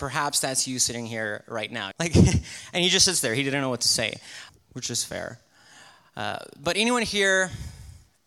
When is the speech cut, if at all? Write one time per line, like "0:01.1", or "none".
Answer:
0:01.9
0:04.5